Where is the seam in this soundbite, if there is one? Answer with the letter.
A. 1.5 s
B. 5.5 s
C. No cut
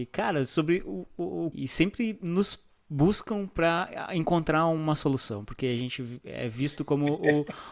A